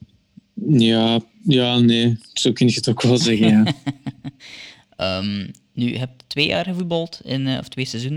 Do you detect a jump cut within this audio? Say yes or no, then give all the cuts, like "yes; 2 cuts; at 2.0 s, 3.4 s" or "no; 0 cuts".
no; 0 cuts